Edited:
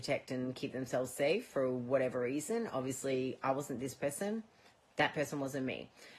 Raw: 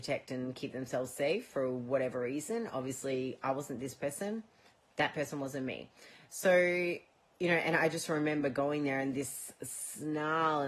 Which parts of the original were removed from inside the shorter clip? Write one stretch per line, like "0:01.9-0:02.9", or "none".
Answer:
none